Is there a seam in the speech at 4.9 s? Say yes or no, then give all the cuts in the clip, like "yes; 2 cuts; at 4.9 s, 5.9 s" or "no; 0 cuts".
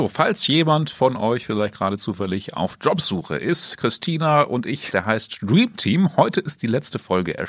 yes; 1 cut; at 4.9 s